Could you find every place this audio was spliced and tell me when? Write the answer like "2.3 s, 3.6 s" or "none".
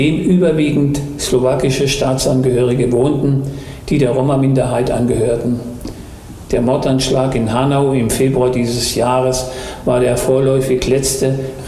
6.5 s